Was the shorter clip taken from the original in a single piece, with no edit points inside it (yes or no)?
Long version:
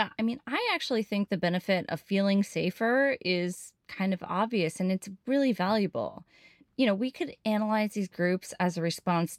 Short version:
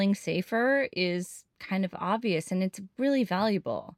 yes